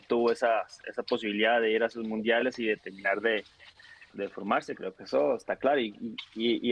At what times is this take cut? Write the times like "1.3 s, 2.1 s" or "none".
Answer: 4.1 s